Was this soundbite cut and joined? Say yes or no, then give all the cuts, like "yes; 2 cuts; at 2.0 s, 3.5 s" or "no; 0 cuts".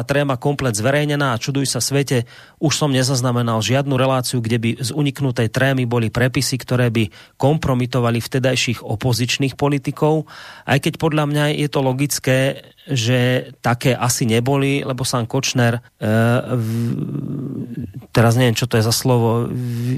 yes; 1 cut; at 15.9 s